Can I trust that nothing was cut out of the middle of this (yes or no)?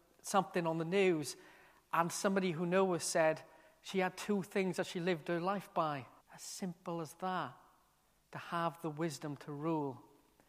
no